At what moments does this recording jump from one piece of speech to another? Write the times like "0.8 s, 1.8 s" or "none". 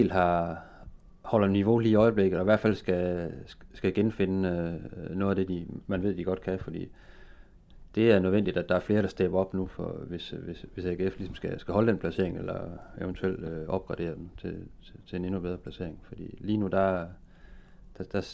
none